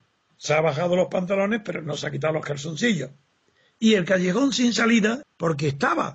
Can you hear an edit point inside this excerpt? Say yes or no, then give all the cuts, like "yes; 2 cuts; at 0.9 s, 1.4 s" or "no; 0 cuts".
yes; 1 cut; at 5.2 s